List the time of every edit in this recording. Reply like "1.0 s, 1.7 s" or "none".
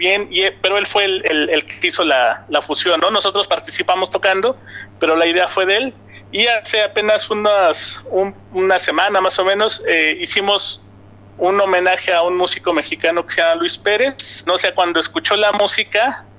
14.5 s